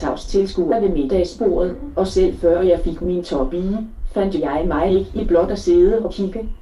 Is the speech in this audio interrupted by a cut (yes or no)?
no